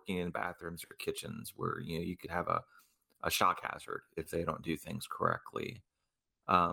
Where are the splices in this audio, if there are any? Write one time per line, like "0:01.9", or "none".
none